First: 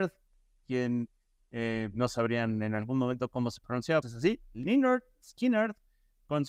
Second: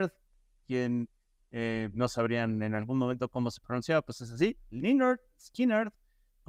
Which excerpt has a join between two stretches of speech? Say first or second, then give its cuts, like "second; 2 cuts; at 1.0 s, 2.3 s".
first; 1 cut; at 4.0 s